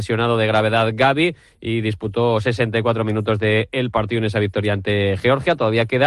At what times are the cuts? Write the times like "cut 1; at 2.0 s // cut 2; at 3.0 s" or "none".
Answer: none